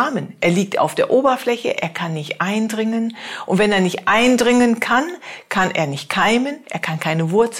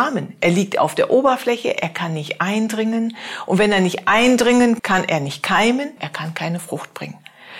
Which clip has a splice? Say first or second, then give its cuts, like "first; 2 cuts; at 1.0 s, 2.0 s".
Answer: second; 2 cuts; at 4.8 s, 6.0 s